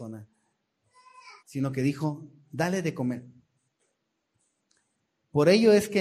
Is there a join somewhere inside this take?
yes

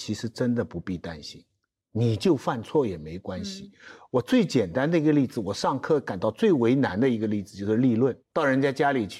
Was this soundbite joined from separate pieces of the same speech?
yes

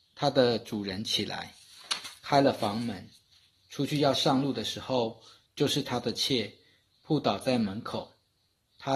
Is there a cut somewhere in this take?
yes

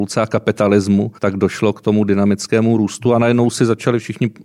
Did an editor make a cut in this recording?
yes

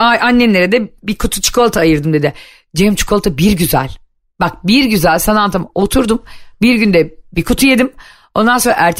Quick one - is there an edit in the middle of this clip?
no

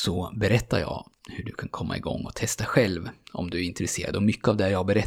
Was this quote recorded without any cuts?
yes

